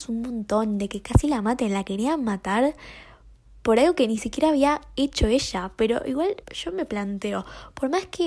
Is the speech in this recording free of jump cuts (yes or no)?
no